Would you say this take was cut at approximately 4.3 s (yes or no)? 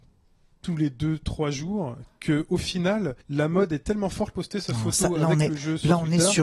yes